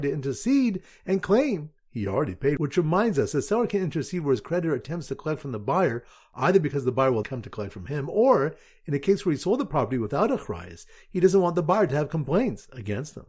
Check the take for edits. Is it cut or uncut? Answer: cut